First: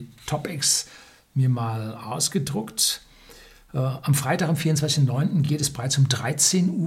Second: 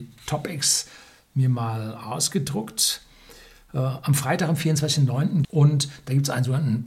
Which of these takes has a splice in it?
second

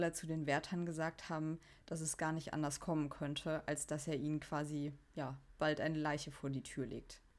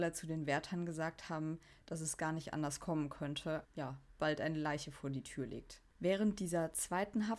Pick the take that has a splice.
second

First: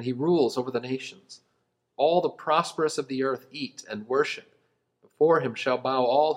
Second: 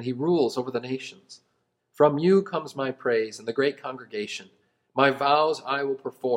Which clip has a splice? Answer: second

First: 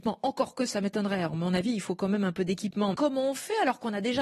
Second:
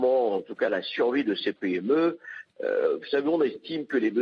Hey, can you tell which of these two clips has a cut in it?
first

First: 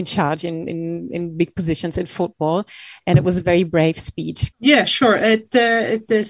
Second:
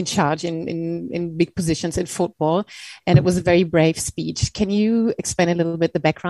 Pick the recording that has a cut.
first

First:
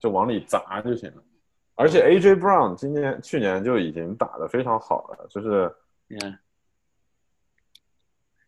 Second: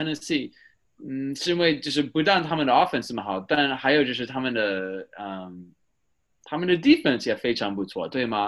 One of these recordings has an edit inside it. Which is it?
first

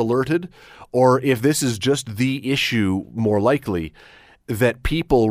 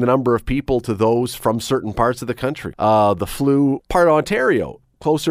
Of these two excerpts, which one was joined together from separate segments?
second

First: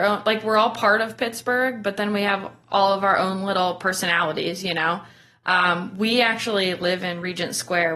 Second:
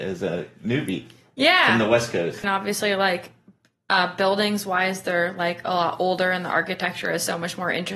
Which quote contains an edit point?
second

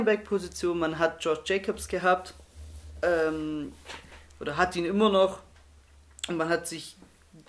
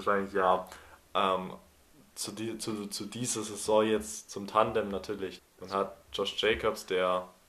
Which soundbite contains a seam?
second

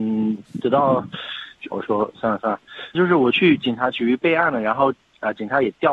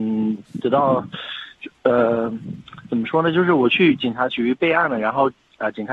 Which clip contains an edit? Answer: first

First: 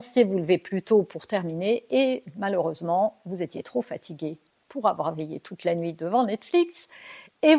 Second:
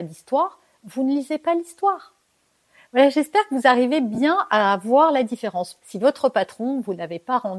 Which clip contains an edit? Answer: second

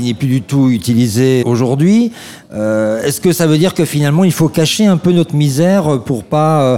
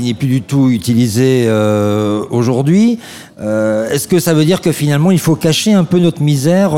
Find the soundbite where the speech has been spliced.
first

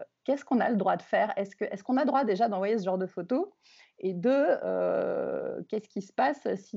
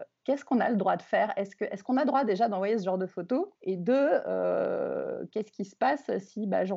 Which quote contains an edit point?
second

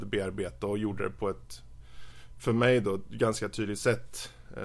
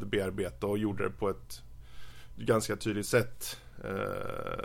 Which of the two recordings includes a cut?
second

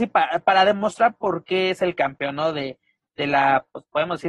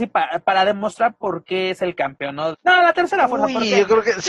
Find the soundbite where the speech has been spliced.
second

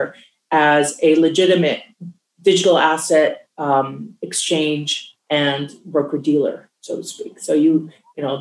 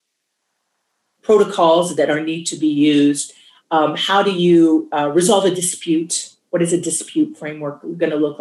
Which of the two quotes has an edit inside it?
first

